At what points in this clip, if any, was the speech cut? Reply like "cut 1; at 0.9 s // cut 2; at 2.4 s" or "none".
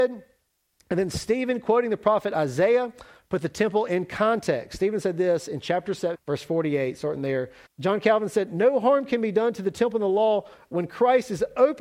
cut 1; at 6.1 s // cut 2; at 7.7 s